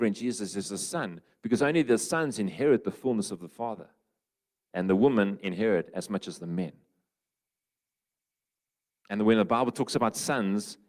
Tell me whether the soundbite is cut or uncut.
uncut